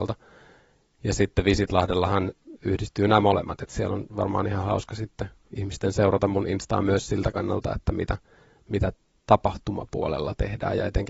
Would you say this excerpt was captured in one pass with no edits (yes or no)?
yes